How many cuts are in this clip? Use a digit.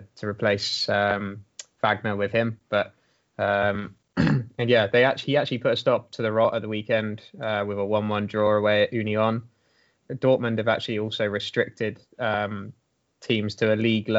1